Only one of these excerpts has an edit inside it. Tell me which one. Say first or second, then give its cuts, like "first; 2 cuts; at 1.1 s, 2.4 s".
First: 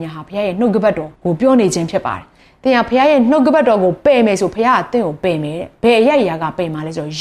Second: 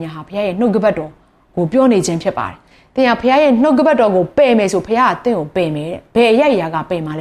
first; 1 cut; at 1.2 s